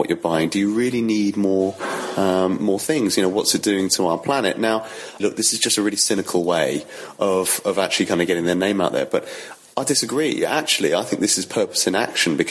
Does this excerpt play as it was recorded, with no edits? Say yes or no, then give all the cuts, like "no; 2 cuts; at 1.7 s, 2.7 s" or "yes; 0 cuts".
no; 1 cut; at 5.2 s